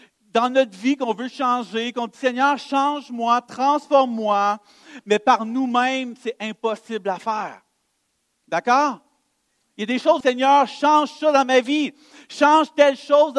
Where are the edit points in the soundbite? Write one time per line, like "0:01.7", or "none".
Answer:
0:10.2